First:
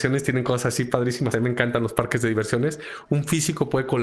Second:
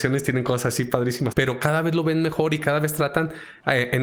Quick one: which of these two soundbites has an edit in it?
second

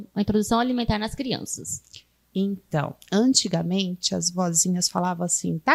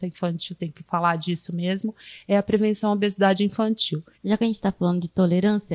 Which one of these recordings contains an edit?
second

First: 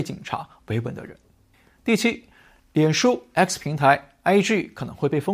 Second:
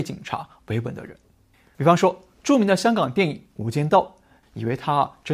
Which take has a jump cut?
second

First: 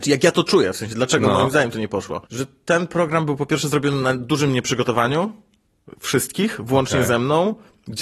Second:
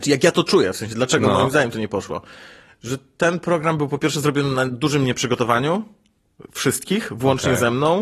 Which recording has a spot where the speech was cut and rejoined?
first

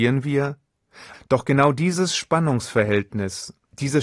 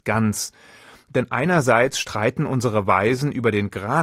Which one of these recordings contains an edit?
first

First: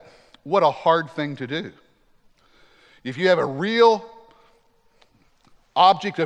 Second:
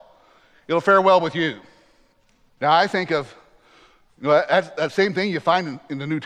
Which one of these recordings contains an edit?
second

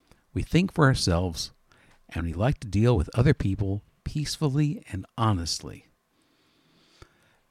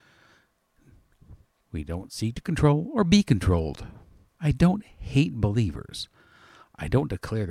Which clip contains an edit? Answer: second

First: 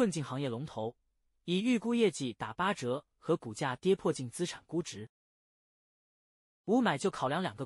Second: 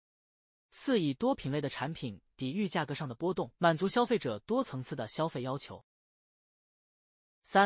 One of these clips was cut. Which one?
second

